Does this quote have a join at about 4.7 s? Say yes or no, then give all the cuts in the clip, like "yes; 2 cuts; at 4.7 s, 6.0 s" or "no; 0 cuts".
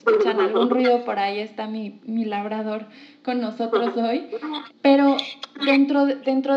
yes; 1 cut; at 4.7 s